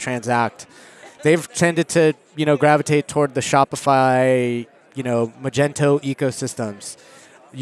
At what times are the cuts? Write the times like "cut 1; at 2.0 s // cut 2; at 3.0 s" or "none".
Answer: none